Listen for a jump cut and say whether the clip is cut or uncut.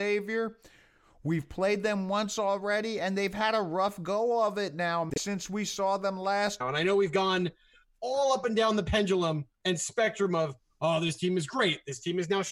cut